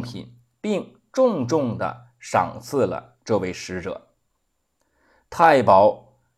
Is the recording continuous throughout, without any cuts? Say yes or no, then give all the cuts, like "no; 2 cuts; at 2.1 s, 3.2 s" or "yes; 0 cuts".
yes; 0 cuts